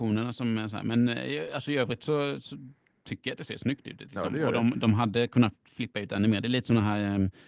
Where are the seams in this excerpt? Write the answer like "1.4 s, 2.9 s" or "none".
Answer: none